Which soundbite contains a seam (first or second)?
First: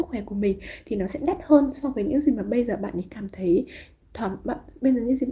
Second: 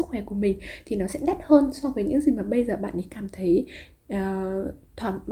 first